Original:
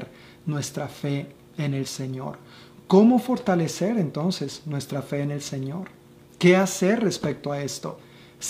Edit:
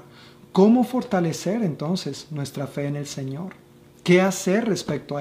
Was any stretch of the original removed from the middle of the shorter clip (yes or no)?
no